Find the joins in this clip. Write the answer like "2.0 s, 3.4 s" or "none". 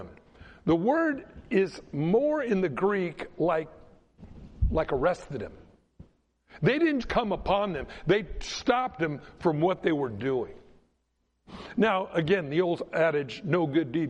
7.0 s